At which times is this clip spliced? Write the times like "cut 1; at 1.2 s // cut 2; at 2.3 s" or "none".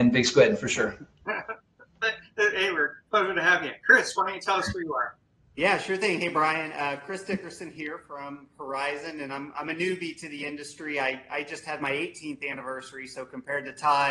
none